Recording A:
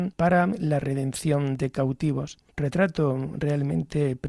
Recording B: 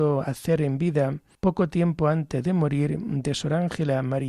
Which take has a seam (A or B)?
A